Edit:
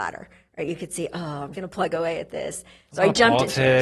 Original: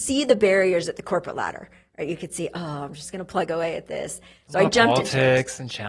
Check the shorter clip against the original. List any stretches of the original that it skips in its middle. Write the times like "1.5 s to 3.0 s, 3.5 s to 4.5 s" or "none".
2.9 s to 3.1 s